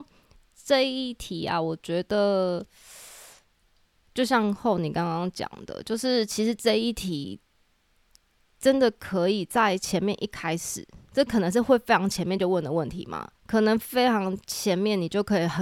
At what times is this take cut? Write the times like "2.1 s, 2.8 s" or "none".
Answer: 11.1 s, 13.3 s